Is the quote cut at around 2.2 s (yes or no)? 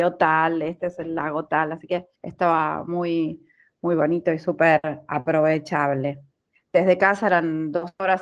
yes